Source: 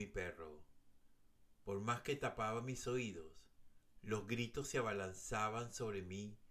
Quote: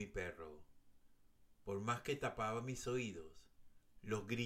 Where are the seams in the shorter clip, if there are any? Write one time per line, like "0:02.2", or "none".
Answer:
none